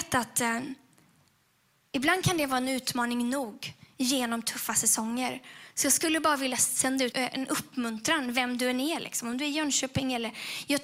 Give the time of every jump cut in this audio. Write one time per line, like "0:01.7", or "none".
0:07.1